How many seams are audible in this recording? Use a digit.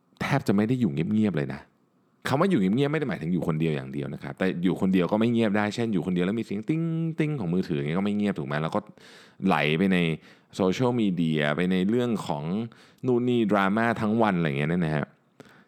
0